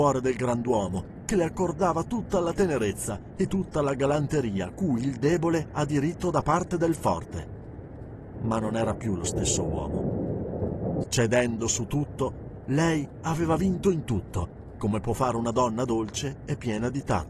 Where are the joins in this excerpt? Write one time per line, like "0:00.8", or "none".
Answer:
0:08.3
0:11.0